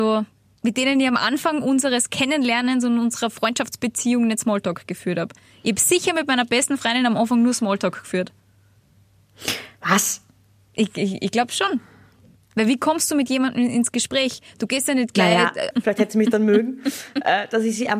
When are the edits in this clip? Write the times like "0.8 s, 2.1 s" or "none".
15.7 s